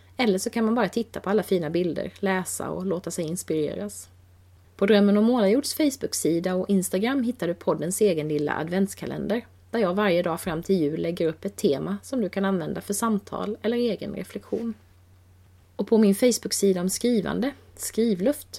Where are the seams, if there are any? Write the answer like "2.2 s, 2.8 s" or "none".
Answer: 4.6 s